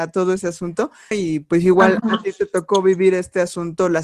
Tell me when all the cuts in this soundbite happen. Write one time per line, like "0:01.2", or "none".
0:01.1